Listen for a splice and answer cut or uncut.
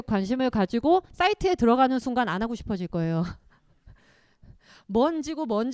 uncut